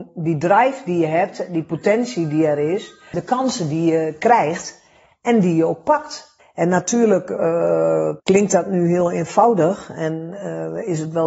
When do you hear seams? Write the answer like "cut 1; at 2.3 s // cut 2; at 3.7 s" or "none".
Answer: cut 1; at 3.1 s // cut 2; at 6.4 s // cut 3; at 8.2 s